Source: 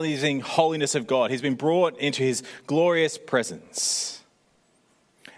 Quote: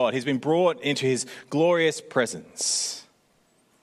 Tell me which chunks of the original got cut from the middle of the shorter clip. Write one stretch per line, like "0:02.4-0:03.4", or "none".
none

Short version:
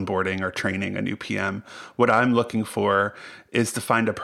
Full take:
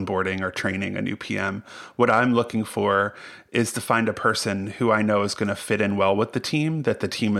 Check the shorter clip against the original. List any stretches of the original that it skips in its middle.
none

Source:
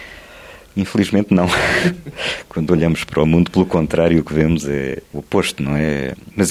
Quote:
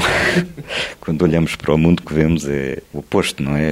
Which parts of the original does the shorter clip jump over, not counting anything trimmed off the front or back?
0:03.5-0:04.2

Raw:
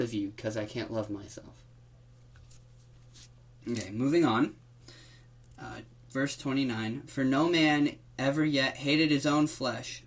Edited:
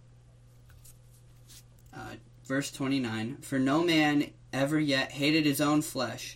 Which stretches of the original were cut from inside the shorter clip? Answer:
0:03.4-0:05.4

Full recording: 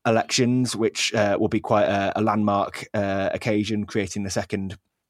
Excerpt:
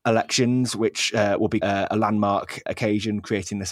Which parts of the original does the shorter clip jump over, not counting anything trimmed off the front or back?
0:01.6-0:01.9
0:02.9-0:03.3

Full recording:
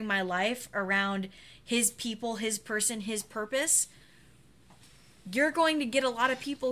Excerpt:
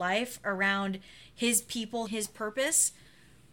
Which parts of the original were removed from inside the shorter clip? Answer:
0:02.4-0:03.0

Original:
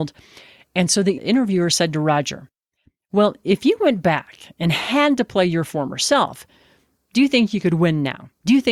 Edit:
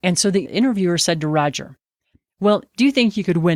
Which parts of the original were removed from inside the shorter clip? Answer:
0:03.4-0:07.0

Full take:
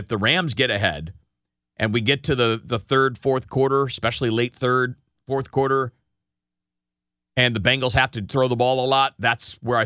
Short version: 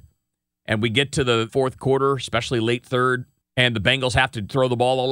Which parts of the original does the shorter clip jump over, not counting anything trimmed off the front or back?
0:02.6-0:03.2
0:05.1-0:07.2

